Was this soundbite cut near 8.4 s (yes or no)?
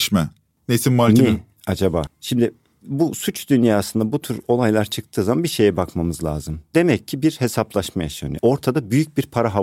yes